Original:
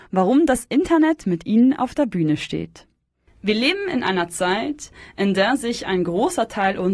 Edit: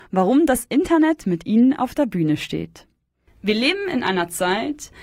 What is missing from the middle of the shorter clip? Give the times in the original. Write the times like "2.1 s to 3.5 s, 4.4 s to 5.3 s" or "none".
none